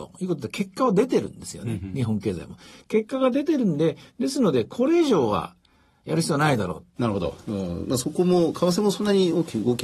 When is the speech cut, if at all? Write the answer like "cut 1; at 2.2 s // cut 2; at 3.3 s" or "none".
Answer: cut 1; at 7.0 s